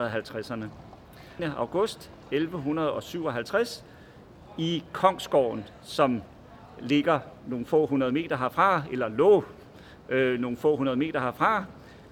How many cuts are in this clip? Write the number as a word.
one